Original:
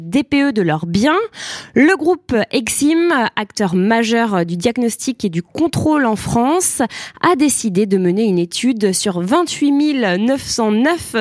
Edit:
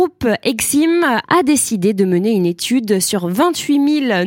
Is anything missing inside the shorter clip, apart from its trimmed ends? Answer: yes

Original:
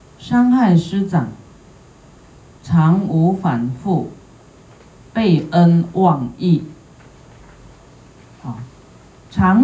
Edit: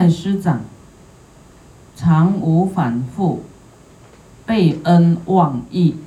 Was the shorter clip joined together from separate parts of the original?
no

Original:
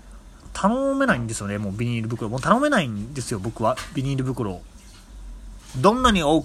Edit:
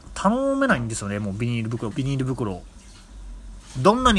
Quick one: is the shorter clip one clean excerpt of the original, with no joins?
no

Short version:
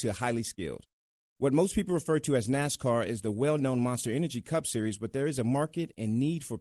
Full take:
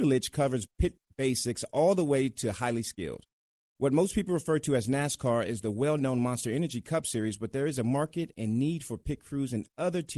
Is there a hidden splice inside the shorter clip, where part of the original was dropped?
no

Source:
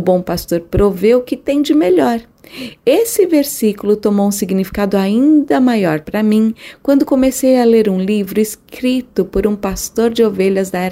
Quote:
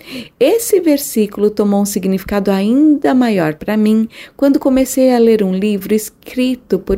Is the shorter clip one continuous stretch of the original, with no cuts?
yes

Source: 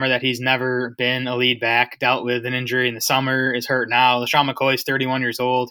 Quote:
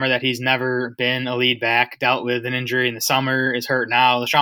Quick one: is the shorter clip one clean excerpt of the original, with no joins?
yes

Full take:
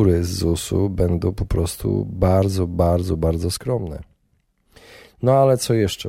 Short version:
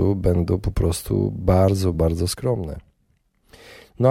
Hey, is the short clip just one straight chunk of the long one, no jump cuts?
no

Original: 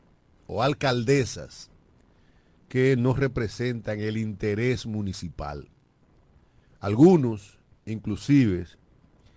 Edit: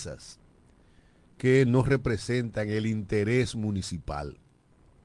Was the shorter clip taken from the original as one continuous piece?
yes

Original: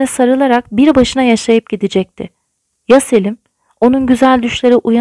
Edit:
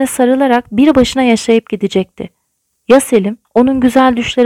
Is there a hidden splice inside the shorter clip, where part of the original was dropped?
yes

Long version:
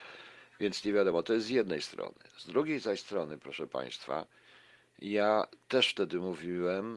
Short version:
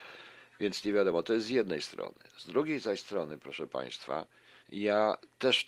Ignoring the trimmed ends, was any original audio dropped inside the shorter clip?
yes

